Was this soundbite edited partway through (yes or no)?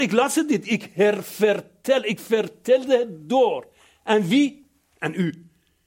no